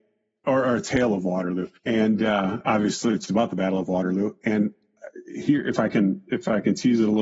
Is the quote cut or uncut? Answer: cut